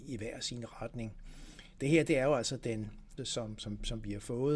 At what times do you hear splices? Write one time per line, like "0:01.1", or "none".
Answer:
0:01.8
0:03.2